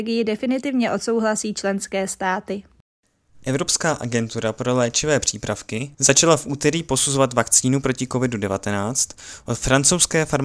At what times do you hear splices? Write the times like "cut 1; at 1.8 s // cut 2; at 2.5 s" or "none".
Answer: cut 1; at 5.9 s